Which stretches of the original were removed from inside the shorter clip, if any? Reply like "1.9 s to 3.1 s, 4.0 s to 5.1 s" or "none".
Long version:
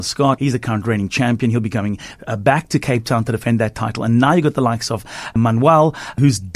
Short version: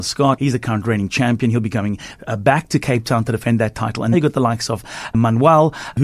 4.1 s to 4.3 s